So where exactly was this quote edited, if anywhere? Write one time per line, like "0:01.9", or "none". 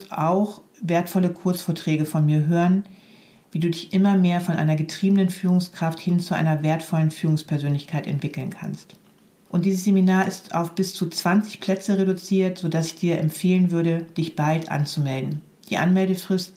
none